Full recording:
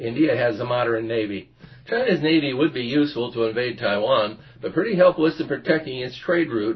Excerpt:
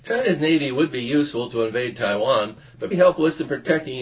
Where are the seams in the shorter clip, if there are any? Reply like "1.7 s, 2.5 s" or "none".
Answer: 2.9 s